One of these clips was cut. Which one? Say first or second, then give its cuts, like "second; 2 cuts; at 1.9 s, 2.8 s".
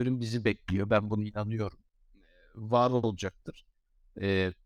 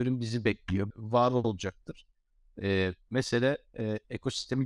second; 1 cut; at 0.9 s